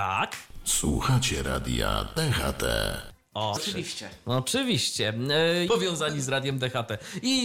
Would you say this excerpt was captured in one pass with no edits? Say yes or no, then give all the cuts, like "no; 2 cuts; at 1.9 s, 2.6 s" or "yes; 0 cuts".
no; 2 cuts; at 3.6 s, 5.7 s